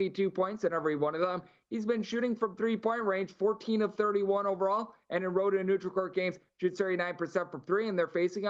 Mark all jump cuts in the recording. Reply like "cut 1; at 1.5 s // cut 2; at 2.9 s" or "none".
none